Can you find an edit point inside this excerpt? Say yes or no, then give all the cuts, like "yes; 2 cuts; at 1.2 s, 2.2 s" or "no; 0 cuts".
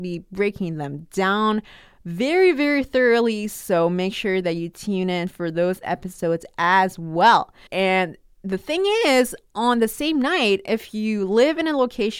yes; 2 cuts; at 7.7 s, 10.6 s